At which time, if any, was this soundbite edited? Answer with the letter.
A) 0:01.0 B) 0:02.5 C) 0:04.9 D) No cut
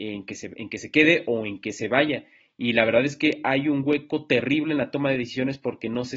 D